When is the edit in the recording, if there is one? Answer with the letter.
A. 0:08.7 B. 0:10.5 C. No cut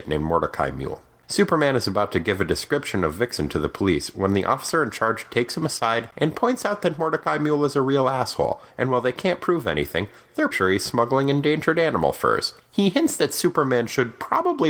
B